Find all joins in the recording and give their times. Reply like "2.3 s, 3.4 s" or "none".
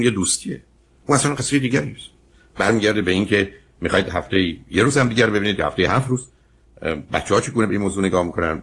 none